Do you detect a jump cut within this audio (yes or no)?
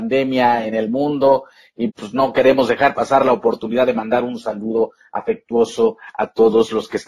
yes